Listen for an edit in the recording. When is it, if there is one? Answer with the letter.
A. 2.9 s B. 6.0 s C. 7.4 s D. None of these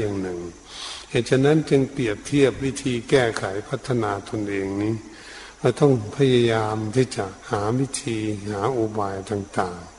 C